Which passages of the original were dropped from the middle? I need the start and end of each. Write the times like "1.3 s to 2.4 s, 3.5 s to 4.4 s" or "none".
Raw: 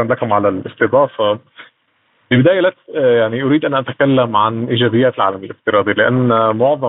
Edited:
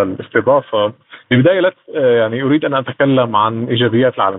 1.7 s to 2.2 s